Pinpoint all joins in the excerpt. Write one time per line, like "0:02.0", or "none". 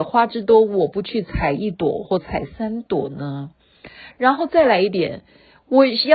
0:02.0